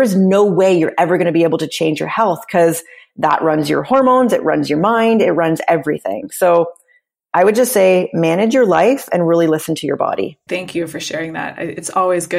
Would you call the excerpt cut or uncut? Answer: cut